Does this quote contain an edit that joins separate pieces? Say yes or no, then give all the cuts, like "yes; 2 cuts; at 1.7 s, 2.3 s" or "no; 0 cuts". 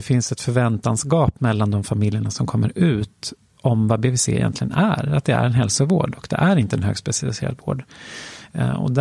yes; 1 cut; at 3.5 s